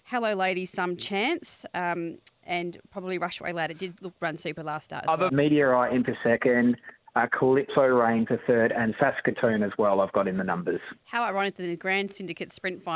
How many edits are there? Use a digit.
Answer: 1